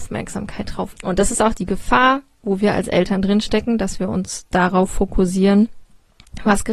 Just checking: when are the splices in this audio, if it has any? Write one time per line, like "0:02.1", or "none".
0:00.9